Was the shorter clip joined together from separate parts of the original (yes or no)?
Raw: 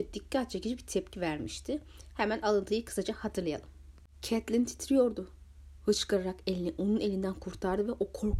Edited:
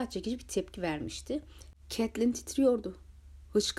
yes